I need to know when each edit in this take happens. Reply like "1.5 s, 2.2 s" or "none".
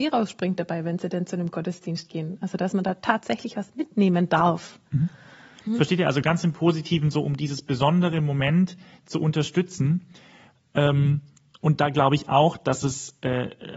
5.7 s